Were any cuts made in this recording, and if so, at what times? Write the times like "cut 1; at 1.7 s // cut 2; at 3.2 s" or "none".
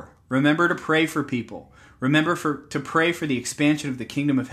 none